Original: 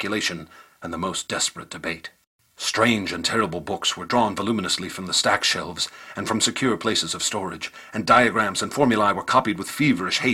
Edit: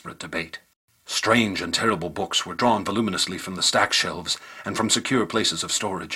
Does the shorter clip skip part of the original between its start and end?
no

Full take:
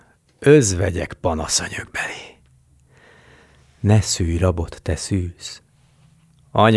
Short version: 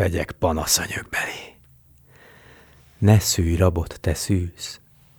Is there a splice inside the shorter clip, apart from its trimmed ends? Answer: no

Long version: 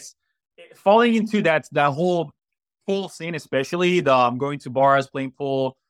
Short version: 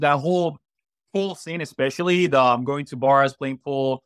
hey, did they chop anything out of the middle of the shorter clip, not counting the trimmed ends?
no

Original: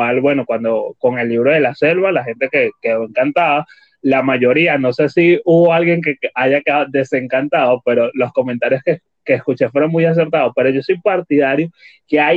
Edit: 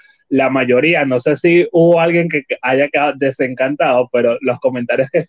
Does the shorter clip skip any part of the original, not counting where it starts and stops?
no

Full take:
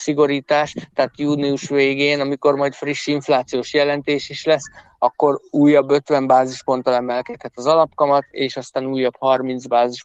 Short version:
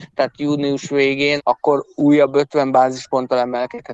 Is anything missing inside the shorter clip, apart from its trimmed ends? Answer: yes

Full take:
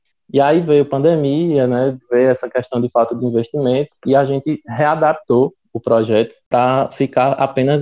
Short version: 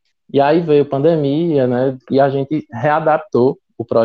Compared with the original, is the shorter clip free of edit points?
no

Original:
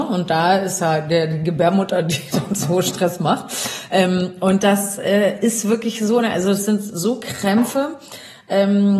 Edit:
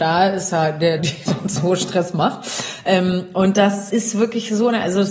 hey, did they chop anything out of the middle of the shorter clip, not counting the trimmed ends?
yes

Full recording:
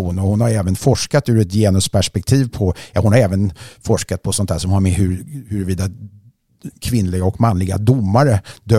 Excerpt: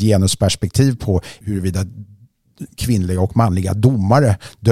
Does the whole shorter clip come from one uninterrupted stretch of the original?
no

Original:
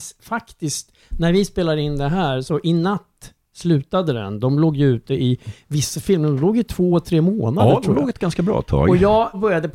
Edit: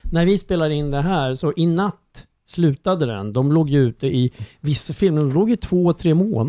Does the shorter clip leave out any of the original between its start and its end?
no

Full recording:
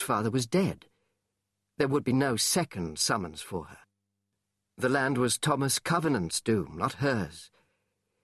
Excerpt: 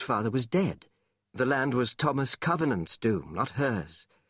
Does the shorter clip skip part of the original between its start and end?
yes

